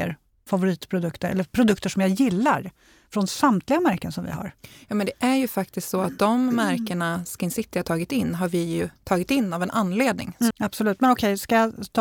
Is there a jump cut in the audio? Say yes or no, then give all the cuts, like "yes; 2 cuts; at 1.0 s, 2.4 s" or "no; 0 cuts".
yes; 1 cut; at 10.5 s